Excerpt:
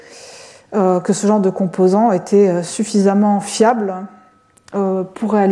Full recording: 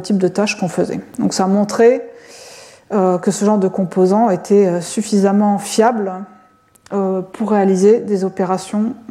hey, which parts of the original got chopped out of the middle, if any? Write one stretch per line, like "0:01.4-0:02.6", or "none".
none